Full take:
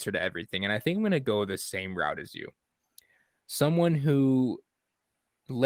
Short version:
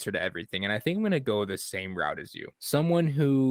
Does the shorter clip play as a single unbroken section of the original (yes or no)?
no